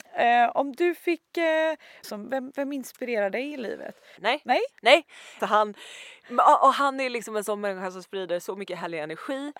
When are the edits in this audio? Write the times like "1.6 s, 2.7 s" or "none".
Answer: 2.0 s, 4.2 s, 5.4 s